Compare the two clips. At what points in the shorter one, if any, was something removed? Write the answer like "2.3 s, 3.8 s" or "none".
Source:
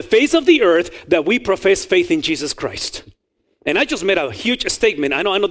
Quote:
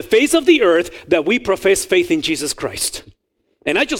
none